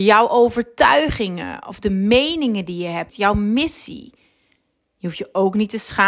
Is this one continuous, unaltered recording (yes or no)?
no